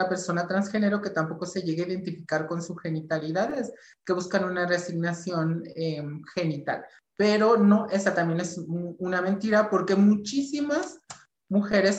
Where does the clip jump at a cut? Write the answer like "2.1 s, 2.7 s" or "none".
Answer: none